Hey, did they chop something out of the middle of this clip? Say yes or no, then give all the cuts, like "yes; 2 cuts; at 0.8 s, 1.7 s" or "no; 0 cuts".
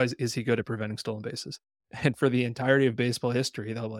no; 0 cuts